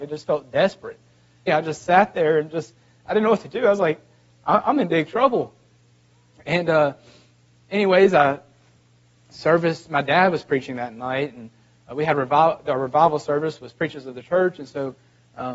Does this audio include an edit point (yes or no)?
yes